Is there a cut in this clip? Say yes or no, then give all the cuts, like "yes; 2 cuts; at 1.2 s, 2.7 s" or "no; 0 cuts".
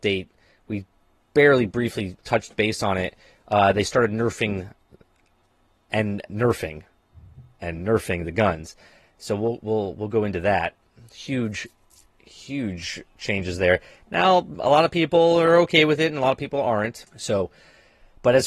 yes; 1 cut; at 17.1 s